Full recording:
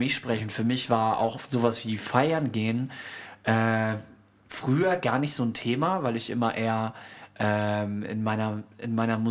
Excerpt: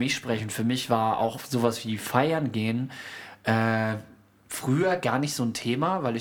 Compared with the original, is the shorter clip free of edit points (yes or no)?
yes